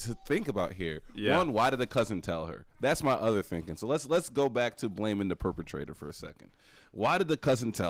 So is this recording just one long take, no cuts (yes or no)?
yes